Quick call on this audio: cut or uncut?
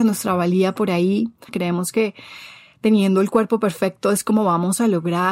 cut